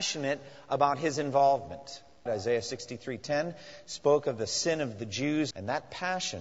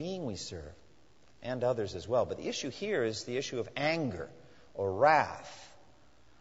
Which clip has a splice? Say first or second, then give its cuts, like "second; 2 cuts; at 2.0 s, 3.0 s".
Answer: first; 2 cuts; at 2.3 s, 5.5 s